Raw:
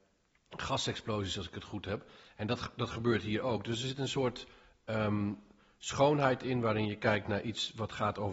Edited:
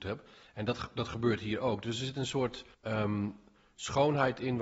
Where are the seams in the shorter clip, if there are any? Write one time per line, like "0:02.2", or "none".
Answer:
0:02.7